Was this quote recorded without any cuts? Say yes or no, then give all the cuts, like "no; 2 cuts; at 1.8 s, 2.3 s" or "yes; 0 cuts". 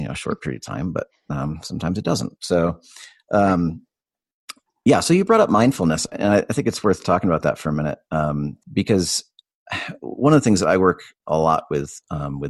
no; 1 cut; at 8.6 s